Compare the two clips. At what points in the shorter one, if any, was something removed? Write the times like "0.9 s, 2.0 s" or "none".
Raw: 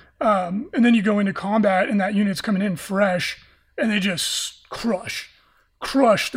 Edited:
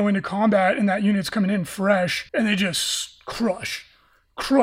2.3 s